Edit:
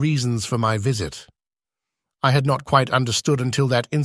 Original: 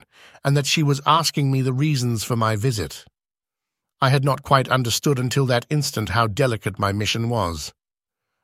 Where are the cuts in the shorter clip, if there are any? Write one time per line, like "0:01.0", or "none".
none